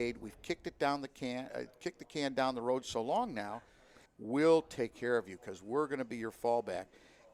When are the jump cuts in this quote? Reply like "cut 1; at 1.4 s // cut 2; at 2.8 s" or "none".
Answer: cut 1; at 4.1 s